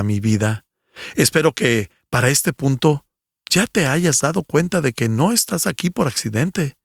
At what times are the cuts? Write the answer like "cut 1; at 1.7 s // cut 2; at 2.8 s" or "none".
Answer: none